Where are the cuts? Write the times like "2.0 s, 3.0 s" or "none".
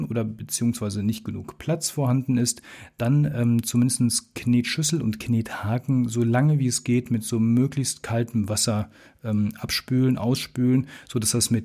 none